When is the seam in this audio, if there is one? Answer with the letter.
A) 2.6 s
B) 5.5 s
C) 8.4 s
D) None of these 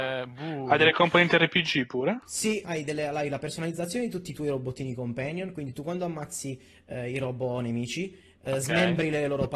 A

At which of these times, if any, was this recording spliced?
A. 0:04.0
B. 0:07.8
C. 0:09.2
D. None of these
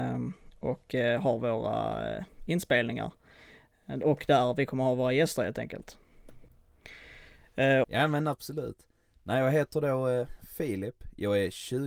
B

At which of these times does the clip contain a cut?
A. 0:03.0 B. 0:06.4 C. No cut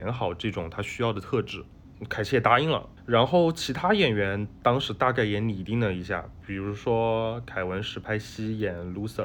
C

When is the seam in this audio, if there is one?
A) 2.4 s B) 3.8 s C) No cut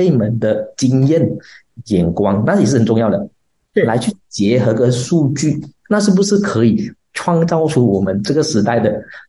C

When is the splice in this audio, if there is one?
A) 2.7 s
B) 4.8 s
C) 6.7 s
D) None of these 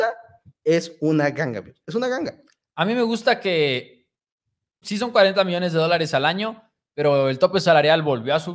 B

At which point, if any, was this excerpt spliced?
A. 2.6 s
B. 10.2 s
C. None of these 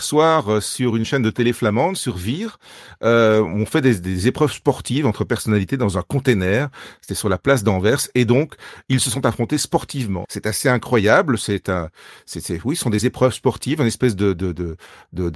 B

